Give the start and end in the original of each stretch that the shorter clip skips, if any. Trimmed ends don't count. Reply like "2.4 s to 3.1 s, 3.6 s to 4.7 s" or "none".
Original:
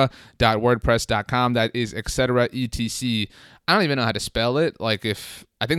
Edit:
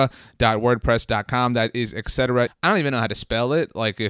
2.5 s to 3.5 s

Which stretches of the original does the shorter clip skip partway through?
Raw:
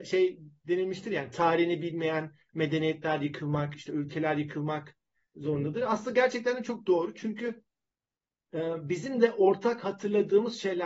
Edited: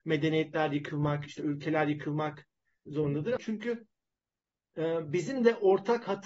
5.9 s to 7.1 s

